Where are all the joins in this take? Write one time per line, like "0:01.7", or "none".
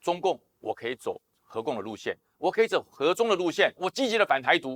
0:03.8